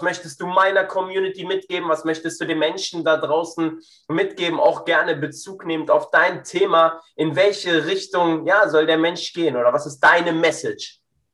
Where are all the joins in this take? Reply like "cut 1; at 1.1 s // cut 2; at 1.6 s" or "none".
none